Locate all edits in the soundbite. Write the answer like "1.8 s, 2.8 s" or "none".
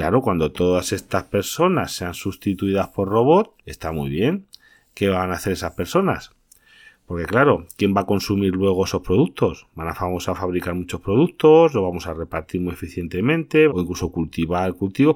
3.6 s, 13.7 s